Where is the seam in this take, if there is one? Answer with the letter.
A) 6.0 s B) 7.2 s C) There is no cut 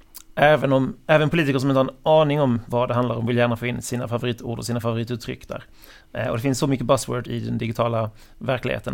B